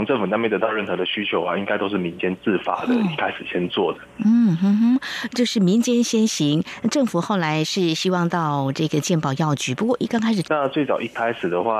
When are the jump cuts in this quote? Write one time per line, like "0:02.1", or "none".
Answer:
0:10.4